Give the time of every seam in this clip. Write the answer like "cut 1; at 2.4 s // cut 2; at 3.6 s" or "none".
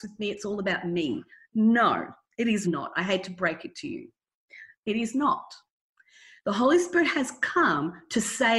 cut 1; at 2.6 s